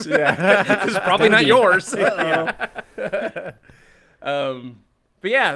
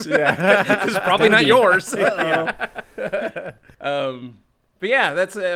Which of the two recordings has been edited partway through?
second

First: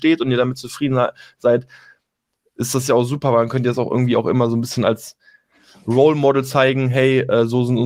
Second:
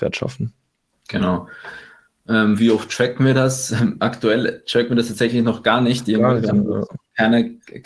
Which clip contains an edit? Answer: second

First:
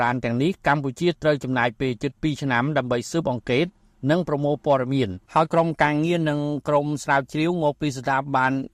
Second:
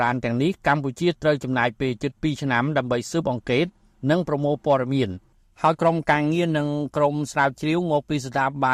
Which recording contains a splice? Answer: first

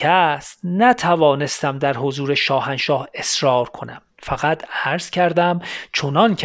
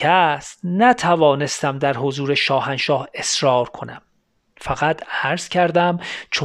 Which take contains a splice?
first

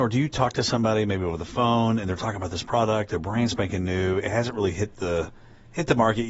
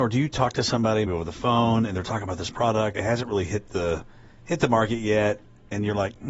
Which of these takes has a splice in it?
second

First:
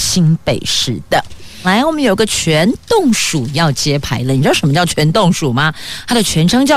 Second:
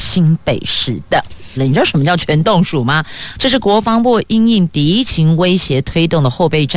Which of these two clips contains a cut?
second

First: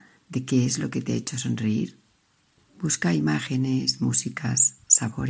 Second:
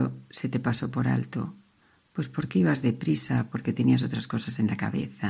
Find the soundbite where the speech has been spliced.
first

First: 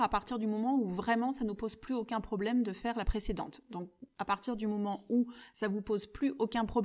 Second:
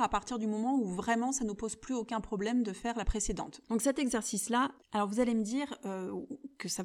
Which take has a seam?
second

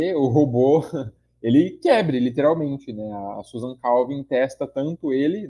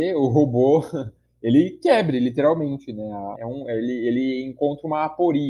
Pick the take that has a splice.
second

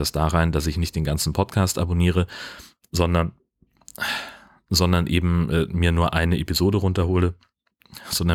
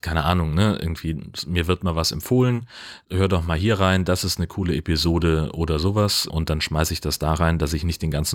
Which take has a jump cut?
second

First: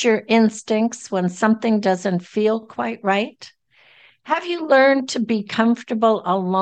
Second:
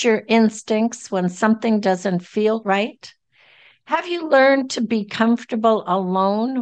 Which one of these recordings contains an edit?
second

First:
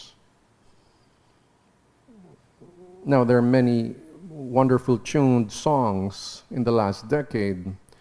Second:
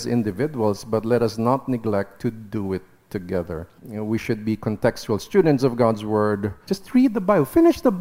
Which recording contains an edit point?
second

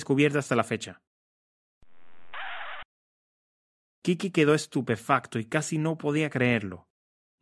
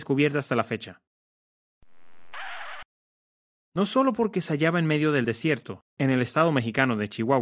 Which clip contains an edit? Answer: second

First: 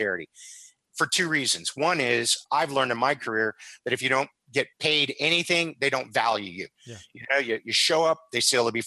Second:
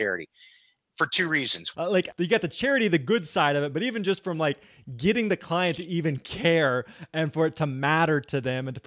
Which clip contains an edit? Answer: second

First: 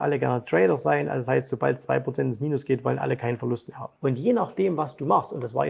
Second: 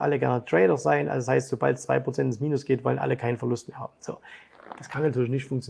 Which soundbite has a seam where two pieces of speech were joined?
first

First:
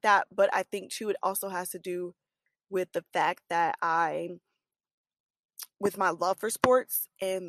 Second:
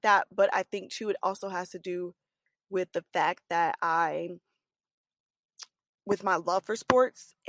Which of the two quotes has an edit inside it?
first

